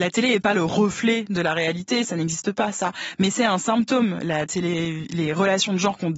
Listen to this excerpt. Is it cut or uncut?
uncut